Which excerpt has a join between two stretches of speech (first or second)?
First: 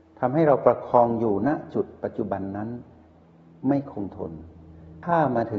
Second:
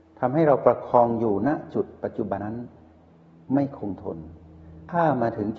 second